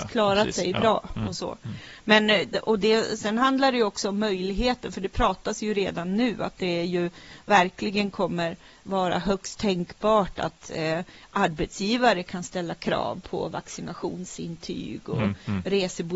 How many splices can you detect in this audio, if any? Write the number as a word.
zero